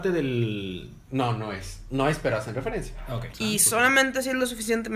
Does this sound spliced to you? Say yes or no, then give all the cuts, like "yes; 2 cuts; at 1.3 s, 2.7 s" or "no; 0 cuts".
yes; 1 cut; at 3.3 s